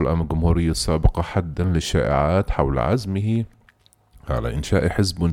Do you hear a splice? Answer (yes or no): no